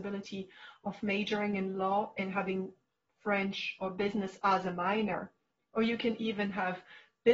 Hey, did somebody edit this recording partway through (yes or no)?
no